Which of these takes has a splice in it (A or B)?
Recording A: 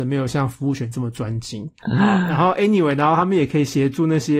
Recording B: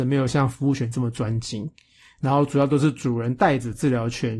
A